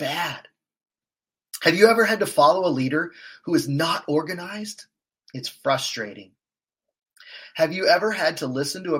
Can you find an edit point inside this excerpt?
no; 0 cuts

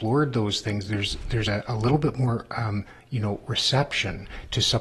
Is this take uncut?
yes; 0 cuts

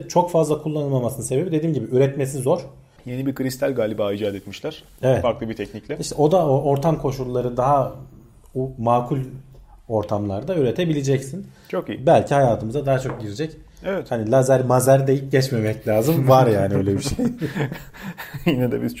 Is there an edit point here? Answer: yes; 1 cut; at 3.0 s

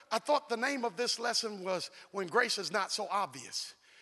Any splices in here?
no; 0 cuts

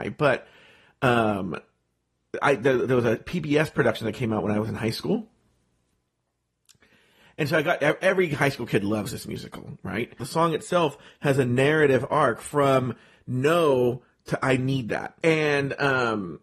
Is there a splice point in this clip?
yes; 2 cuts; at 10.2 s, 15.2 s

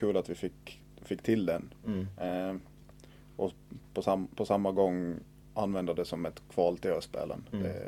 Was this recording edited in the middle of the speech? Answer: no; 0 cuts

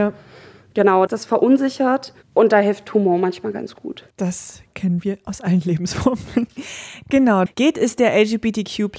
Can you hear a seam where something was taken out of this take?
yes; 2 cuts; at 1.1 s, 7.5 s

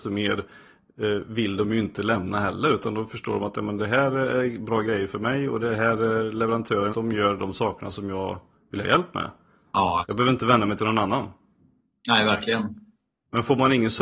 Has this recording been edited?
yes; 1 cut; at 6.9 s

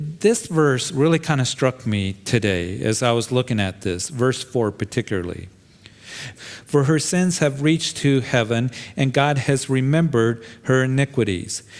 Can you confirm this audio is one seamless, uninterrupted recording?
no; 1 cut; at 6.3 s

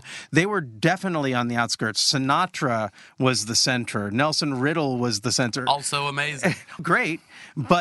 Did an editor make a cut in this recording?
yes; 1 cut; at 6.8 s

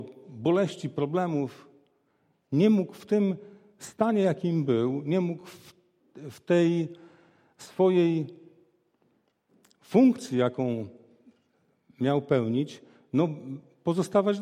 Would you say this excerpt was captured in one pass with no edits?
yes; 0 cuts

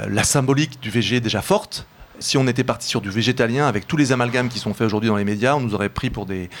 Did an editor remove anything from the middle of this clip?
yes; 1 cut; at 2.2 s

